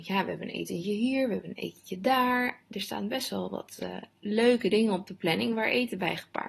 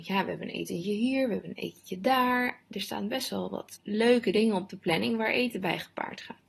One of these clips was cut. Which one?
second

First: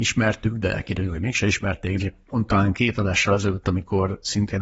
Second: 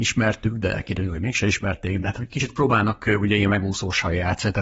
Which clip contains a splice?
first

